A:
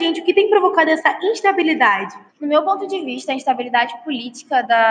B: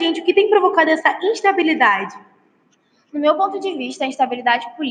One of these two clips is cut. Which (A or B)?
A